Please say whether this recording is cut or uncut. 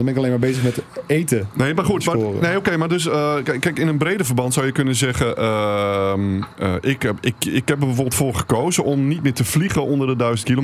uncut